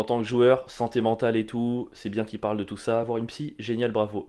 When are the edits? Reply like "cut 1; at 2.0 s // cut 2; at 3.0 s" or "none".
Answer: none